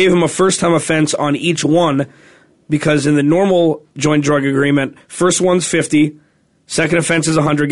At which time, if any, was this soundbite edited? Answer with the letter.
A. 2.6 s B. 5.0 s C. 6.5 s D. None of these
D